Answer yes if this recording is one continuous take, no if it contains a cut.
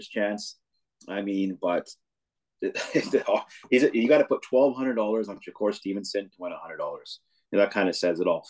yes